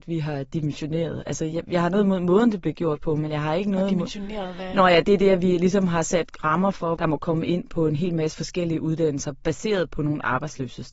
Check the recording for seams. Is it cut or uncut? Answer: cut